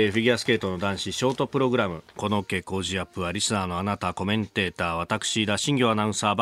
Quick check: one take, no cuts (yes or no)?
no